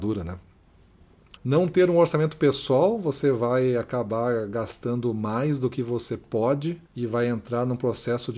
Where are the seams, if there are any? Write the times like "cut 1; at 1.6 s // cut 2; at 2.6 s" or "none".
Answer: cut 1; at 1.4 s // cut 2; at 6.9 s